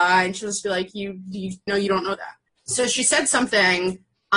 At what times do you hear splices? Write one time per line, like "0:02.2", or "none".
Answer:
0:01.7

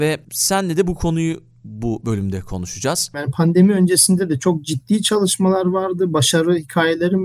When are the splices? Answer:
0:03.1

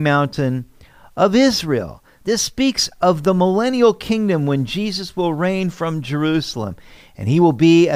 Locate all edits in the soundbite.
none

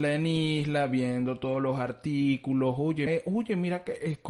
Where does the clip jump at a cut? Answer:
0:03.1

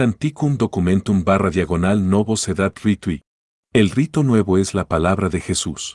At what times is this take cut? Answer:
0:03.6

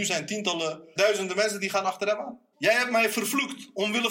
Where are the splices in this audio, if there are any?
0:01.0
0:02.5

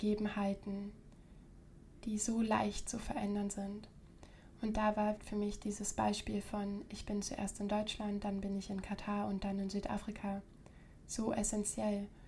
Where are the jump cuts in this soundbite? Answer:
0:05.2

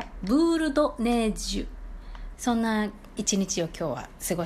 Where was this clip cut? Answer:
0:02.3

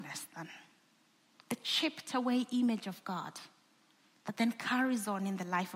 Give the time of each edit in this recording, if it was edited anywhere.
none

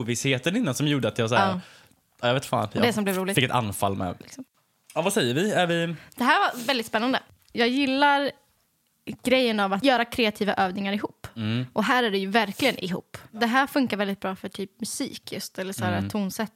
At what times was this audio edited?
0:04.2

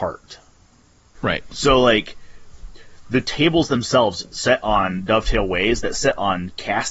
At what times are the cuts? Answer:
0:01.2

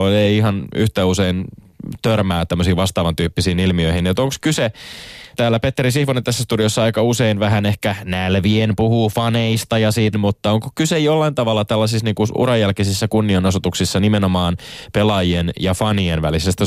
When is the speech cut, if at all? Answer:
0:05.3
0:10.1

